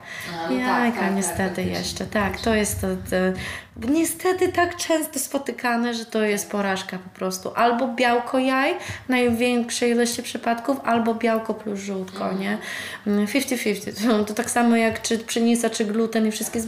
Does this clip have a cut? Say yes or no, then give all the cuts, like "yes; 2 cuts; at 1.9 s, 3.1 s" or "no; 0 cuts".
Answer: no; 0 cuts